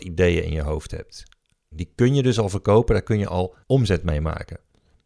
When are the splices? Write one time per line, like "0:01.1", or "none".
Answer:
0:01.7
0:03.6